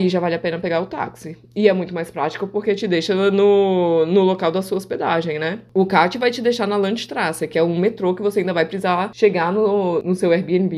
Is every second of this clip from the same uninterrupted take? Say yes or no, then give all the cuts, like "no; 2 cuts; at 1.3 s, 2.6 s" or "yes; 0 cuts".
yes; 0 cuts